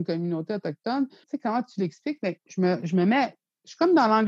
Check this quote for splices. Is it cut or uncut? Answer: cut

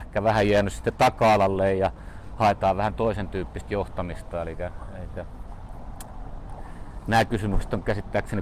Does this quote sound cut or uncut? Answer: uncut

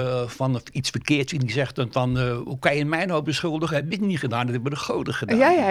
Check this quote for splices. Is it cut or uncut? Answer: uncut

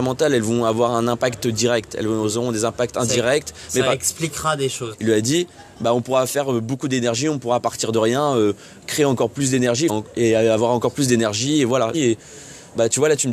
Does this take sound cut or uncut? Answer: cut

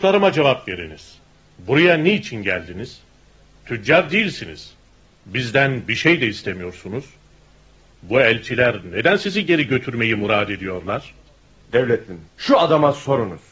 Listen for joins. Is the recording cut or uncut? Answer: cut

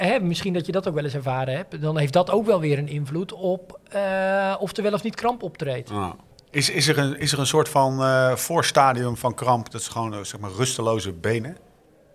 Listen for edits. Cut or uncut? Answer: uncut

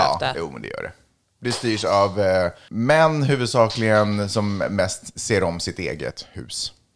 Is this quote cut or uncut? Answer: cut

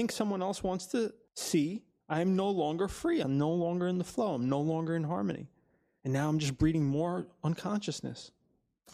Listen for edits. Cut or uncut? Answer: cut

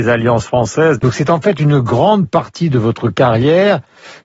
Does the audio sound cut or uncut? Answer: cut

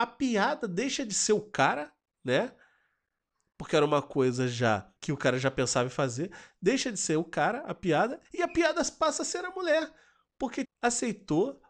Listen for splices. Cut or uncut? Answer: cut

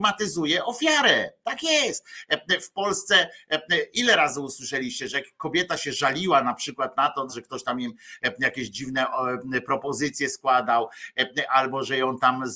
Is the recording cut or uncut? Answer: cut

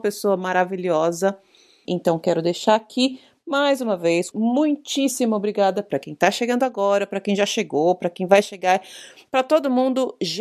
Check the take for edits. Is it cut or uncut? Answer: cut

